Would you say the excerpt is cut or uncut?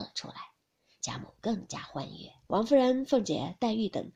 cut